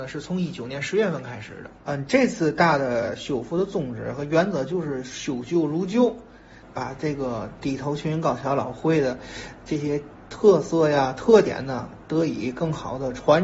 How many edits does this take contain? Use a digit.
1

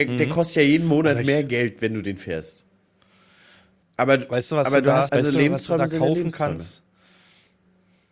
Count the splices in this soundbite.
2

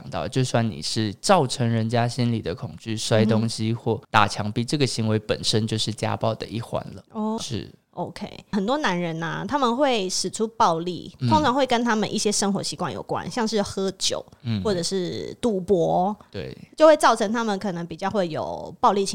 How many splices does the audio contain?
2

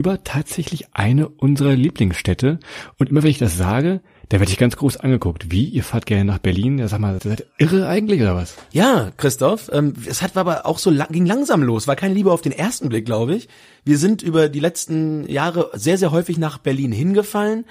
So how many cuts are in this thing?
1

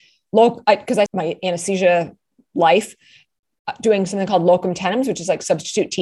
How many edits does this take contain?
1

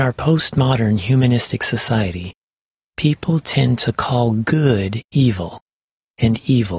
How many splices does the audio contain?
0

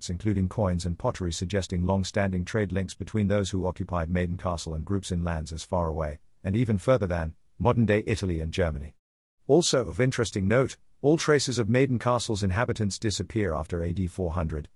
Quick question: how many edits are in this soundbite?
0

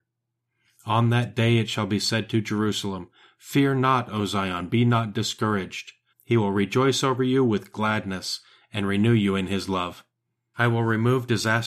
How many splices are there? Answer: 2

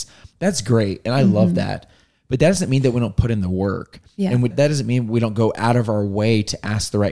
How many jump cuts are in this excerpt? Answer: 1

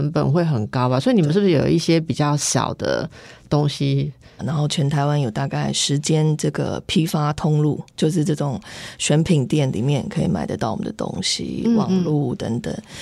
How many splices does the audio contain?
1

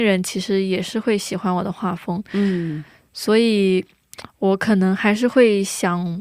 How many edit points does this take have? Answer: 0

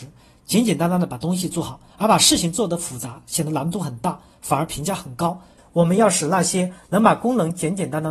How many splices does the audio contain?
2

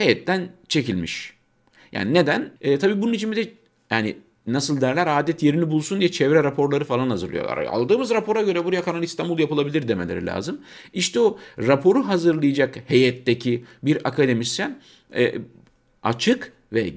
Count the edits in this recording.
1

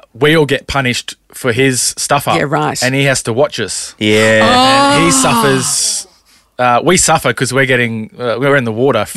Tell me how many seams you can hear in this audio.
0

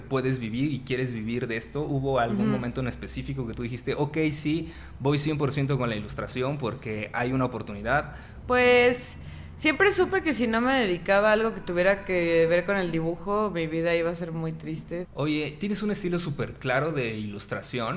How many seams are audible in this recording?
2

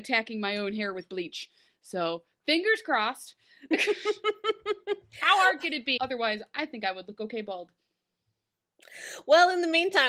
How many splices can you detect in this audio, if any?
1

